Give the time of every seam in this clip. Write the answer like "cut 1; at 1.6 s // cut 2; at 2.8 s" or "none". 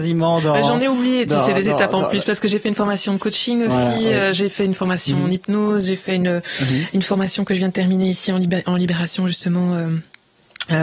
none